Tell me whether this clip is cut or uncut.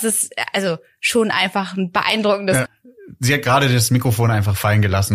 cut